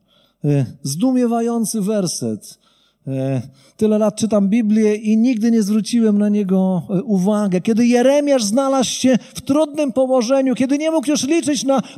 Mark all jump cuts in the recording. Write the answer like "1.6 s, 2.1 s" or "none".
none